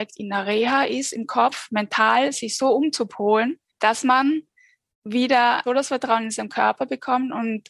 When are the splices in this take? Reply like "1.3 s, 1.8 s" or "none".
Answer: 3.7 s, 5.7 s